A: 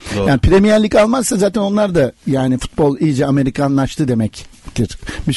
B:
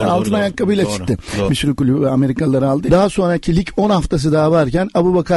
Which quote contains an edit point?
B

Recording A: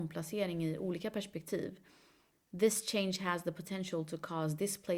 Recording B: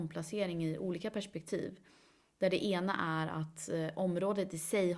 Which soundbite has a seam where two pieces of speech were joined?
A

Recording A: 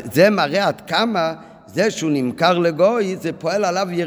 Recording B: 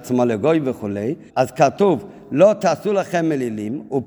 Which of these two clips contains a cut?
B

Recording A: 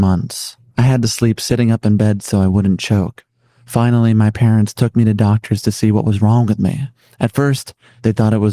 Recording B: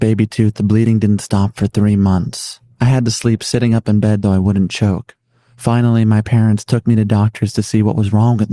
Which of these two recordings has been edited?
B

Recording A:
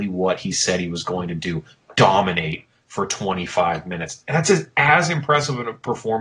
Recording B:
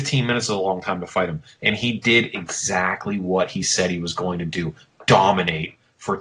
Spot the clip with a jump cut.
B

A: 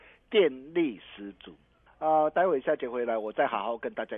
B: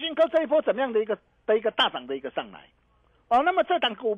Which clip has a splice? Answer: A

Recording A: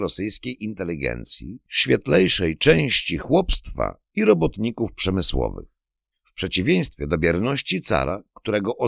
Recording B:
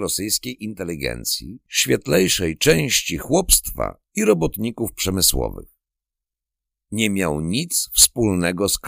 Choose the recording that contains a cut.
A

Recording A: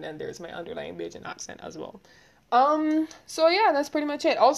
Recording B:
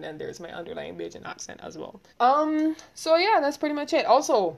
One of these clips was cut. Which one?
B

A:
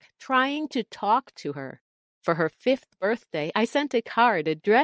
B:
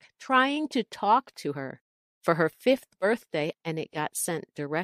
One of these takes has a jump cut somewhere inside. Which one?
B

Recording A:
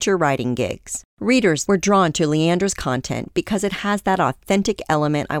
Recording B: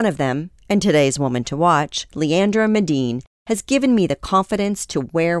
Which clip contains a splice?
A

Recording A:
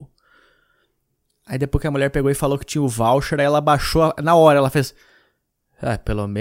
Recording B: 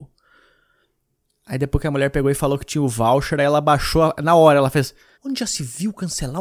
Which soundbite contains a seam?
B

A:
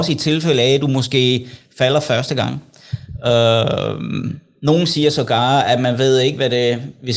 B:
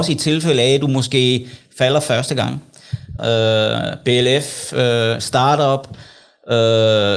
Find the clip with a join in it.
B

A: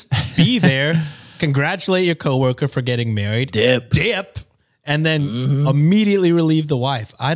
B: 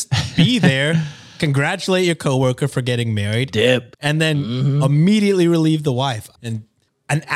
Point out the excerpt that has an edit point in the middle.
B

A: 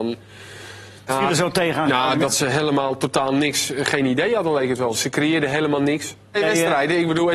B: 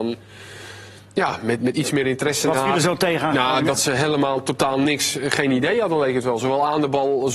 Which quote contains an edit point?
A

